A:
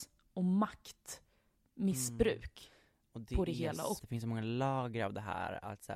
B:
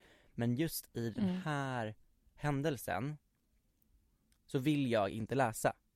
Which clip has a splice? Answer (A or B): A